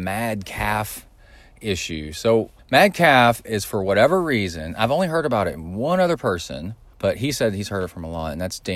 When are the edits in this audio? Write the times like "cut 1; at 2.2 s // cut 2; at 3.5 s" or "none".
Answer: cut 1; at 2.6 s // cut 2; at 6.9 s